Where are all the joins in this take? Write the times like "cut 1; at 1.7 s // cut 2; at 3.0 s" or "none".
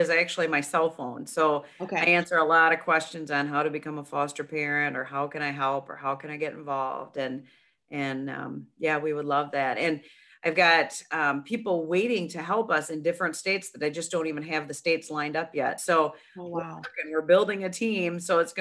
none

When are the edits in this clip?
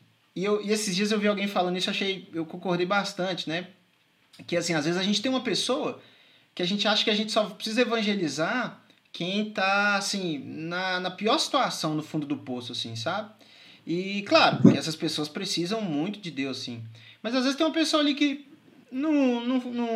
none

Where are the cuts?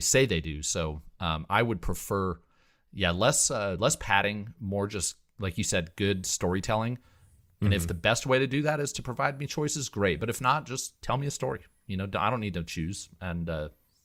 none

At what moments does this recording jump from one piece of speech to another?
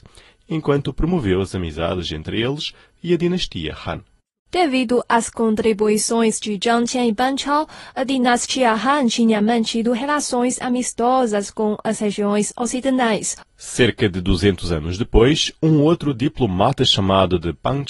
cut 1; at 13.4 s

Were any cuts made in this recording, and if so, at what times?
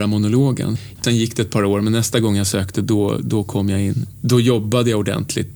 cut 1; at 1.0 s

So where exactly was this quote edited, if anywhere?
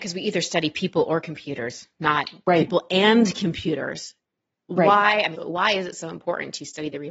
cut 1; at 5.3 s

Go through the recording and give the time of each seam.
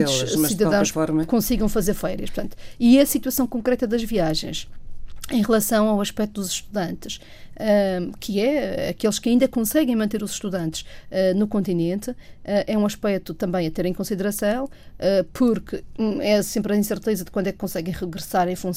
none

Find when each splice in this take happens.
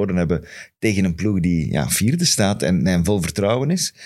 none

